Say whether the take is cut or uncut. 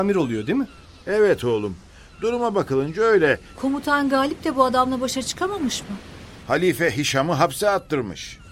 cut